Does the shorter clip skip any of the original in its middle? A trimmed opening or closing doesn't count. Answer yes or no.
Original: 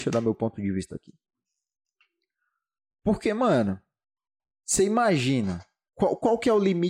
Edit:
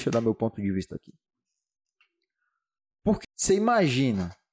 yes